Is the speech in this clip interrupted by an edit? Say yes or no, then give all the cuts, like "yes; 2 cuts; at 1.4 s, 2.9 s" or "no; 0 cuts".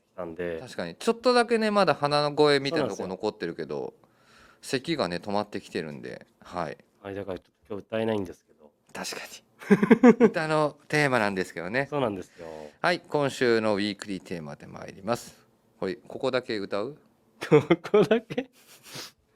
no; 0 cuts